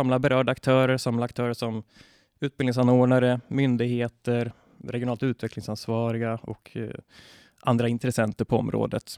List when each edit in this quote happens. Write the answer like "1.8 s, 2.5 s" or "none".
4.8 s